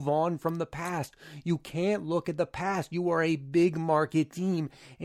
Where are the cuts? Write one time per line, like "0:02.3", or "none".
none